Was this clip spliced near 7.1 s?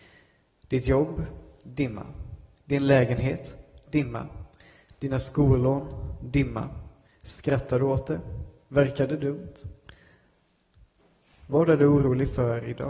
yes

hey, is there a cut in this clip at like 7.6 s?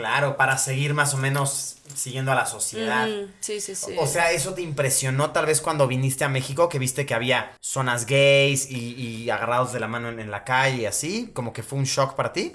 yes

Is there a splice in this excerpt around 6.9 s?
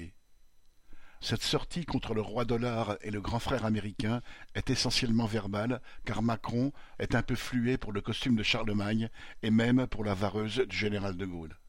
yes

